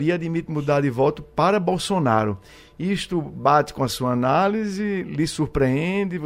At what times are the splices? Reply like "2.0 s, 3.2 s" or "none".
none